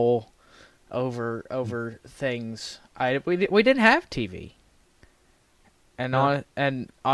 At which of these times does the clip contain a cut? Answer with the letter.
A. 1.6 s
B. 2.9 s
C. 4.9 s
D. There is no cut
D